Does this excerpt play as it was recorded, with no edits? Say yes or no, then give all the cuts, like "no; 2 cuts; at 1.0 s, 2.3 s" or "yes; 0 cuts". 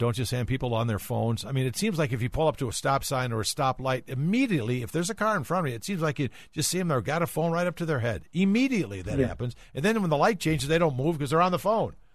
yes; 0 cuts